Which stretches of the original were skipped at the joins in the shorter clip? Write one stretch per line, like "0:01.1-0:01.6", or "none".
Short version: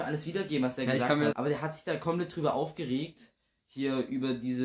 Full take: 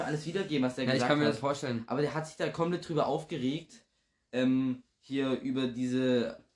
0:01.3-0:01.9
0:04.1-0:04.9